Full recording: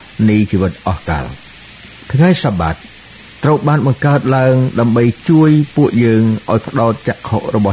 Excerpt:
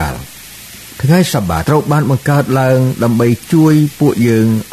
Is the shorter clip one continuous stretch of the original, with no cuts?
no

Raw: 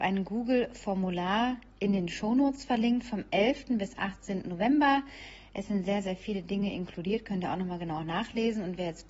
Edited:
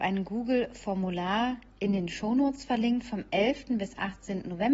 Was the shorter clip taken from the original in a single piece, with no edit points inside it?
yes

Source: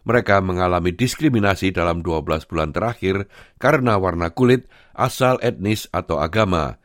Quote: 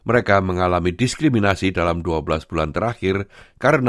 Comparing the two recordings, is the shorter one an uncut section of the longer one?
yes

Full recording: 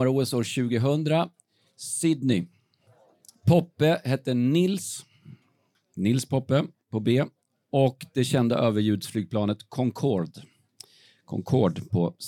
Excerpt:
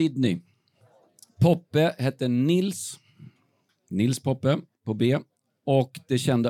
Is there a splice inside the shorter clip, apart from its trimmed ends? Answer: no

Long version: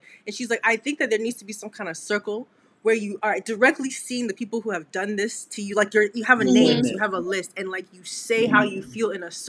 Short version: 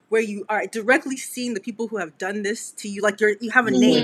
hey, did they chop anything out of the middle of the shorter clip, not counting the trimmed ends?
no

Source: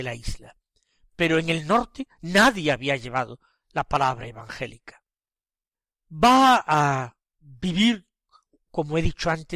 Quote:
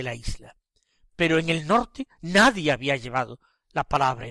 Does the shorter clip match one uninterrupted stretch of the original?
yes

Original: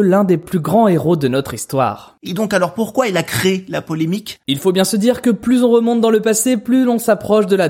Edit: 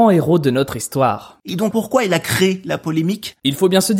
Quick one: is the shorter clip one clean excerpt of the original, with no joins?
no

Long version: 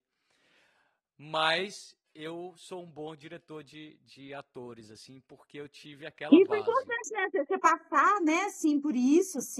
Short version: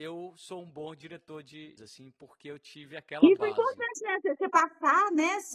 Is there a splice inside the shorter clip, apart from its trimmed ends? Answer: yes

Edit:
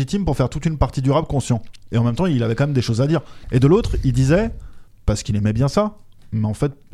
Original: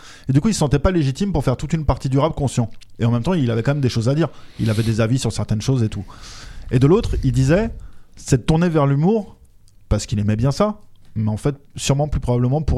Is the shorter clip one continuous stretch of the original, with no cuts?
no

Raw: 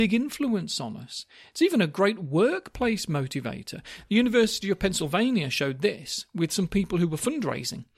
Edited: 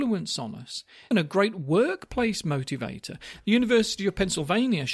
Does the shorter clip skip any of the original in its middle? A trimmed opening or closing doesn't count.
yes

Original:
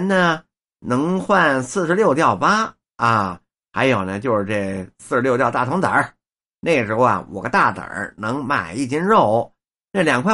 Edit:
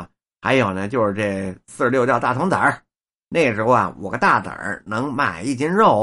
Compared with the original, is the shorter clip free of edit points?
yes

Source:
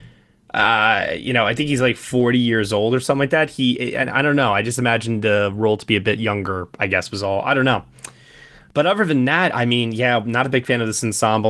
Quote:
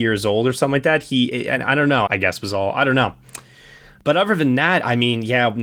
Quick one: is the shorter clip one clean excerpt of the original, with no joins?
no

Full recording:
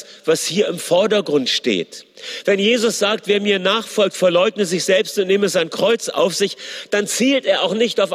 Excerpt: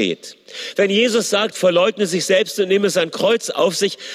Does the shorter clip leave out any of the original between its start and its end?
yes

